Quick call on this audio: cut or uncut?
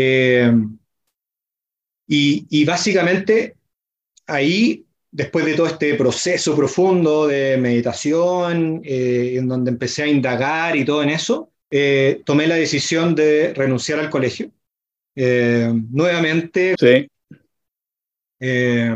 cut